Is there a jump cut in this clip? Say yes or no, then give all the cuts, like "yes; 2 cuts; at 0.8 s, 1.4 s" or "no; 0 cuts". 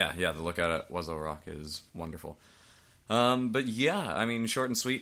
yes; 1 cut; at 1.9 s